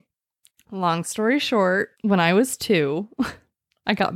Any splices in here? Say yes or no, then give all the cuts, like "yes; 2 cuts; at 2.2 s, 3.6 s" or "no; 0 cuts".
yes; 1 cut; at 1.9 s